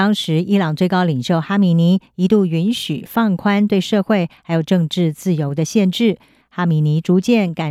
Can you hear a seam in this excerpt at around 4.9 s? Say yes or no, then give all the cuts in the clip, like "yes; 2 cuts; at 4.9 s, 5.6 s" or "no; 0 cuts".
no; 1 cut; at 6.4 s